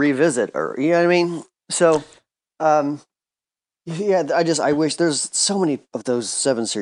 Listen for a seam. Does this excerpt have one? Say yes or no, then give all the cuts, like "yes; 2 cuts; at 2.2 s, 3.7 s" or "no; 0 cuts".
no; 0 cuts